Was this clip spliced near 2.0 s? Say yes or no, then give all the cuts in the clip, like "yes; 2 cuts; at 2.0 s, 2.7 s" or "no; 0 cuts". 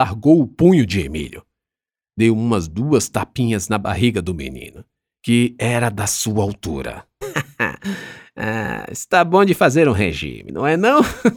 no; 1 cut; at 7.2 s